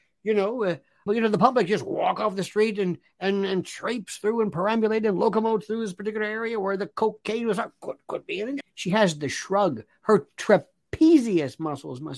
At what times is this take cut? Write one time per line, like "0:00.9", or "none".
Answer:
0:01.1
0:08.6

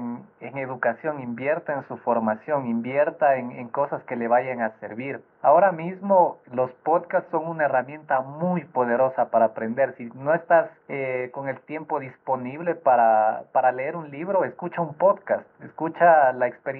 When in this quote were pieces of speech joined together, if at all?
none

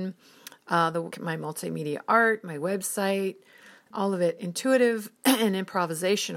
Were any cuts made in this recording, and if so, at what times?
0:01.1
0:03.9

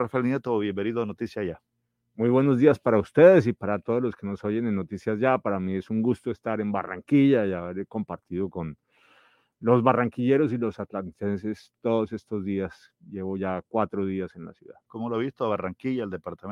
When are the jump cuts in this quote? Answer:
0:14.9

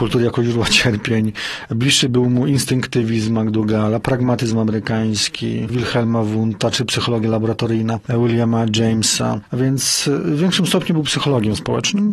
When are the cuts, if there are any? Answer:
0:05.7

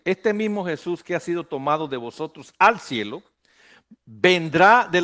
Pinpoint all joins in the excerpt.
none

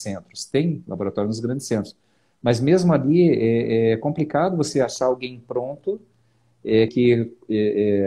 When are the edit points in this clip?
0:06.9

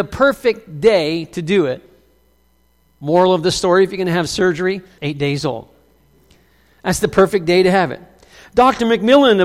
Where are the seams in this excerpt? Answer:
0:05.0

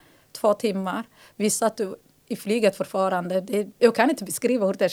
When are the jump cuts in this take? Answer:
0:03.8

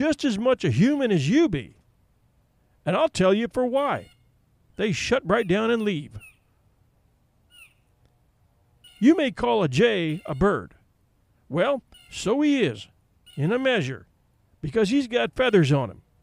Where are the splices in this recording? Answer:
0:04.7

